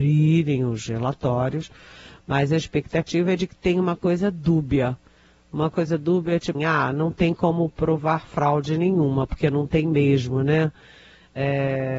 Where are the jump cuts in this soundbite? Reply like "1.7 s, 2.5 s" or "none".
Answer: 6.5 s